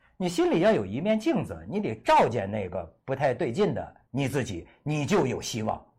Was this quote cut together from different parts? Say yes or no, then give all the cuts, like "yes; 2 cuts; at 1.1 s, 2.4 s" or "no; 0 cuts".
no; 0 cuts